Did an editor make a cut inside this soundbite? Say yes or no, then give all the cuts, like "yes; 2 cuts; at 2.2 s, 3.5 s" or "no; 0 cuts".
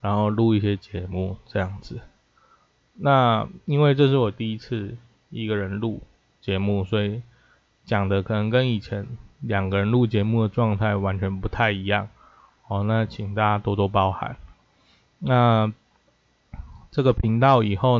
no; 0 cuts